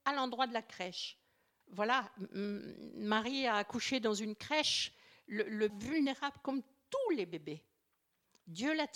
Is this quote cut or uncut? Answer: cut